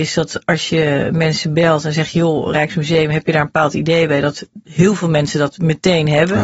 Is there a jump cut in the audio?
no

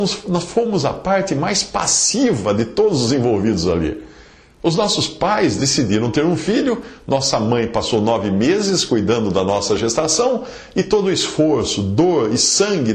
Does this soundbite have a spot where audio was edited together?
no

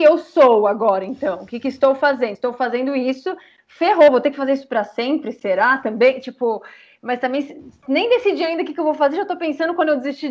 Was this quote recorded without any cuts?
yes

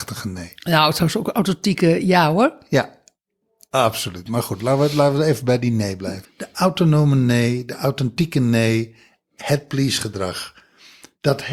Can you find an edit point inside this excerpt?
yes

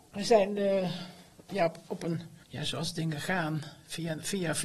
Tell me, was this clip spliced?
yes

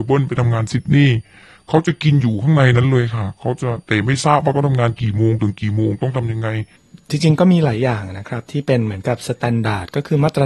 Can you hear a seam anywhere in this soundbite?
no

